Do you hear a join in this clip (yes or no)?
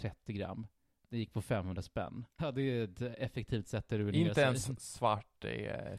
yes